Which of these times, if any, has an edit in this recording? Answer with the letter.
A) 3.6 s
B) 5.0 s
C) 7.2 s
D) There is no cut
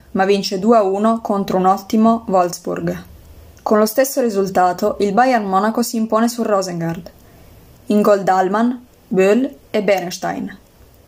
A